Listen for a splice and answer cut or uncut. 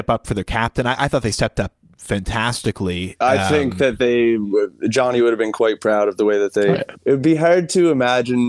cut